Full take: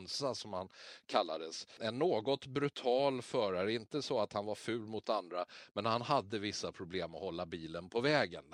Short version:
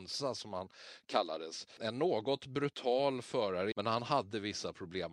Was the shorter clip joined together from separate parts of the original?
yes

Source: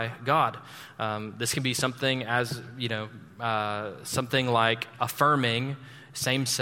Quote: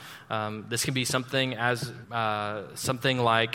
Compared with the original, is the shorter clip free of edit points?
no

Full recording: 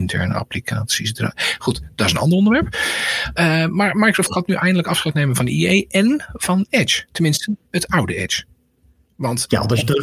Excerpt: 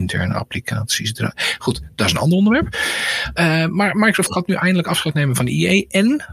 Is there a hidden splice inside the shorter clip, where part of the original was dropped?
no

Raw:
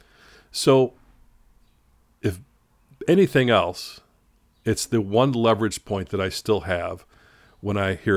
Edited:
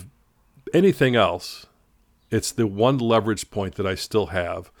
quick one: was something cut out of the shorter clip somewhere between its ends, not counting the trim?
no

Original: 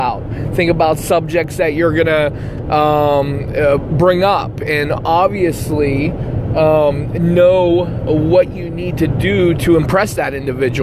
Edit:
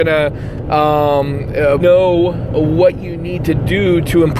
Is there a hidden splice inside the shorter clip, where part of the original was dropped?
yes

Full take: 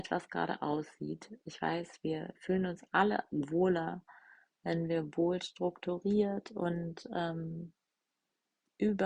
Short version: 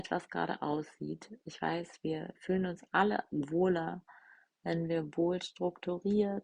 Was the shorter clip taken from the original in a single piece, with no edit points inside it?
yes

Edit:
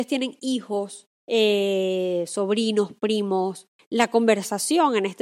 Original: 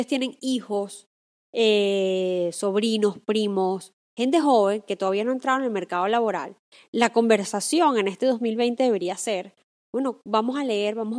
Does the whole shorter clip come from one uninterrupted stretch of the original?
no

